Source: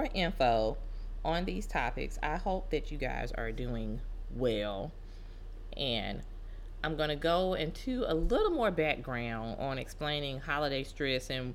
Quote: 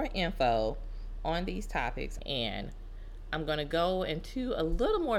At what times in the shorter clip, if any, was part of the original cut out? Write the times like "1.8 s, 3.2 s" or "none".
2.2 s

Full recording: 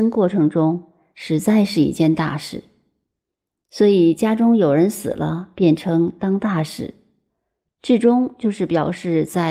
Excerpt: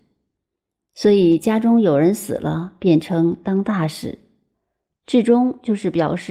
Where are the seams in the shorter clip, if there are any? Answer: none

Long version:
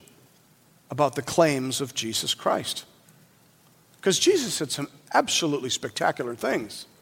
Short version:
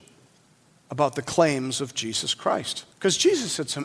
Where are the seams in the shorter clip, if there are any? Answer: 2.9 s

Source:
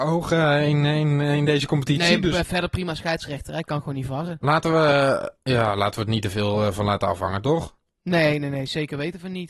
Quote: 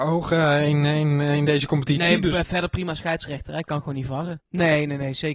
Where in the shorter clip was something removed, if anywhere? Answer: 4.4 s

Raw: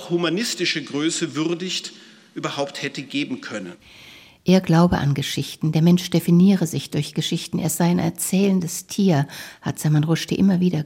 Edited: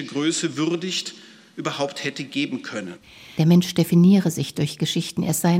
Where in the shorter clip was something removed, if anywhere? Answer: 3.4 s

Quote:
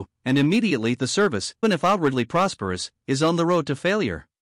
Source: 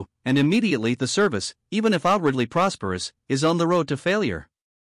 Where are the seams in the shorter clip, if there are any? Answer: 1.6 s

